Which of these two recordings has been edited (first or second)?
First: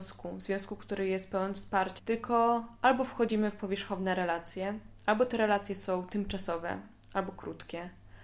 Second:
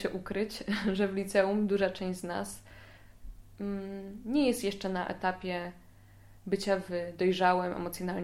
first